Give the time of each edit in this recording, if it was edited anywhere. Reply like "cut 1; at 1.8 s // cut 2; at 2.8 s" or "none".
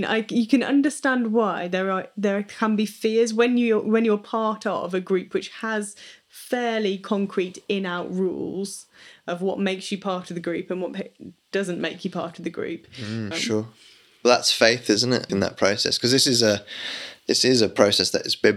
cut 1; at 13.3 s // cut 2; at 15.3 s